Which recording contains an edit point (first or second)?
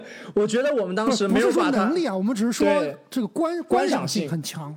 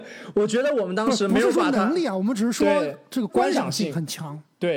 second